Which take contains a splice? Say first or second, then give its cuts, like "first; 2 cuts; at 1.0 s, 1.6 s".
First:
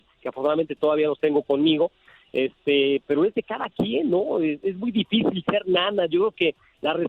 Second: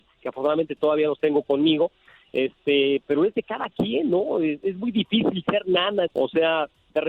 second; 1 cut; at 6.1 s